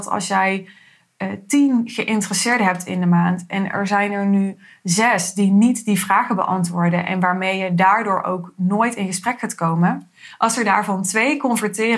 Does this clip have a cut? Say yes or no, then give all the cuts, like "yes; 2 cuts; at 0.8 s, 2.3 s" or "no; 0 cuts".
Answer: no; 0 cuts